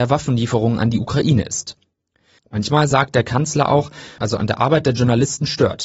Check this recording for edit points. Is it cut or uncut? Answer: cut